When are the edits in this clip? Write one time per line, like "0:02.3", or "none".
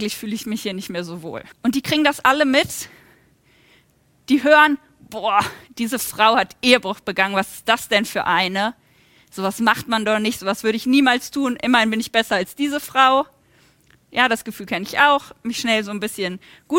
0:01.5

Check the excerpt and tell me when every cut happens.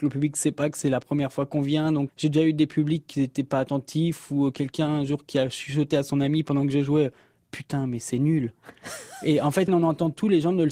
0:02.1
0:09.7

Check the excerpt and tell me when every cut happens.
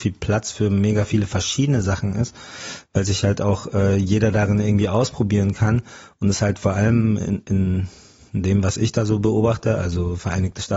none

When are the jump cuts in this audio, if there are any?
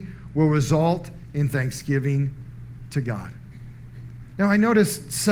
none

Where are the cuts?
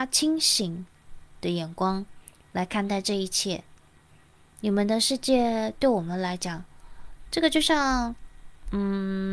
0:07.3

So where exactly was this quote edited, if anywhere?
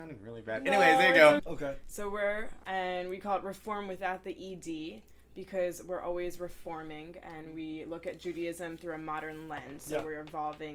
0:01.4
0:02.6

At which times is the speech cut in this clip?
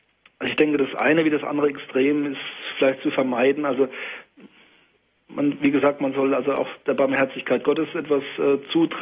none

